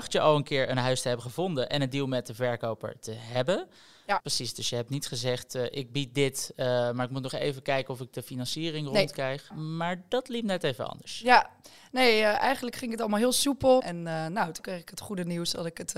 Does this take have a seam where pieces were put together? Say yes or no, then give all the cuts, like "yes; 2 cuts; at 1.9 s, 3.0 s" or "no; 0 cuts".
yes; 3 cuts; at 4.2 s, 9.5 s, 13.8 s